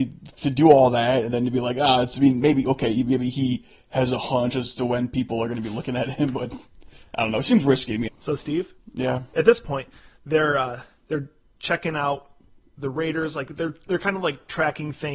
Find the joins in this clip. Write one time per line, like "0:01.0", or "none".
0:08.1